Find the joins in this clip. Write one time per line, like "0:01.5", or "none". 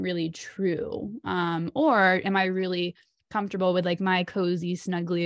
none